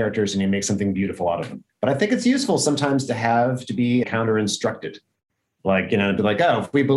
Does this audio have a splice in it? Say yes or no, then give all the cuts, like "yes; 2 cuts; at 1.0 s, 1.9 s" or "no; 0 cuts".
yes; 2 cuts; at 1.7 s, 4.0 s